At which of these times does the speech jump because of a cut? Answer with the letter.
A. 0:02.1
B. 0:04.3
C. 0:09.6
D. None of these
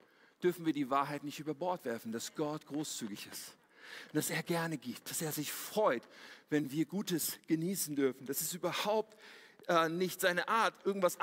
D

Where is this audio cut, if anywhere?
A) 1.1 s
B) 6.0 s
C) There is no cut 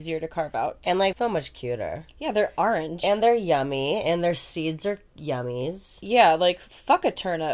A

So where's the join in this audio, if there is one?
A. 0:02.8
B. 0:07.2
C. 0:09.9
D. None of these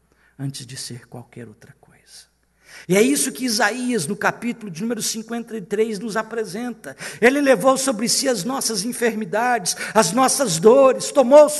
A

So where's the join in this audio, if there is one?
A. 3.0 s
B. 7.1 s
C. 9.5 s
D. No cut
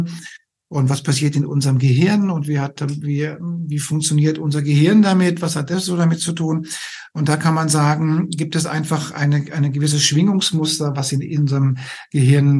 D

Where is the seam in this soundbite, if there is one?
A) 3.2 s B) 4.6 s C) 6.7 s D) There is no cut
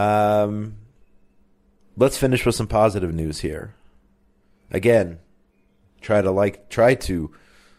C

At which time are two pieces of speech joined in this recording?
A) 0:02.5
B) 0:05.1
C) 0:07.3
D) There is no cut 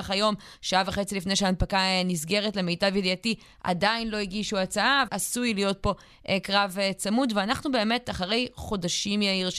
B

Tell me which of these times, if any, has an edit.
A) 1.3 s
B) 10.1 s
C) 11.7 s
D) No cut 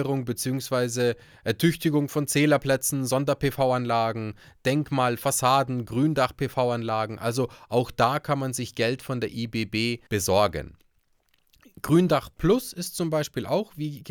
B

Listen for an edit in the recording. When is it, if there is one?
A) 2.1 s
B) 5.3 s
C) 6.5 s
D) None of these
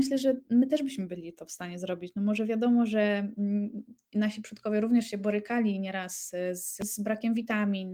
D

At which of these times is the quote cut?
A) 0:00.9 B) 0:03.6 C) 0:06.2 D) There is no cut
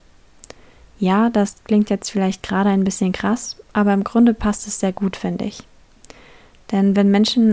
D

